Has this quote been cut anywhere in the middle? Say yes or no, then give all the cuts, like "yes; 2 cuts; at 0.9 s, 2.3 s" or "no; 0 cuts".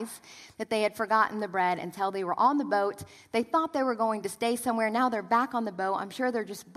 no; 0 cuts